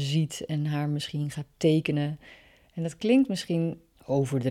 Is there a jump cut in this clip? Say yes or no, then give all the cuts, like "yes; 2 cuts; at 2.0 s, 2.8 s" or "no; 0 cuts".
no; 0 cuts